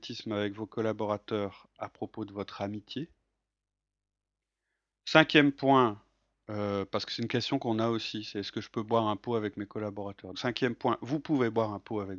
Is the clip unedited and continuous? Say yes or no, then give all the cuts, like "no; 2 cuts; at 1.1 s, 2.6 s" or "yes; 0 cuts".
no; 1 cut; at 10.3 s